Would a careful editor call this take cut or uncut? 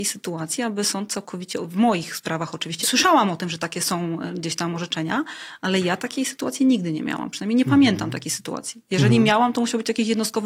cut